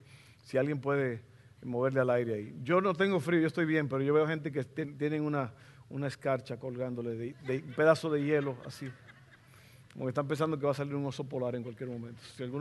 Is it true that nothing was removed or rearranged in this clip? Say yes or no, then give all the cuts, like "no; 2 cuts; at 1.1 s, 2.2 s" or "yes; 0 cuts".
yes; 0 cuts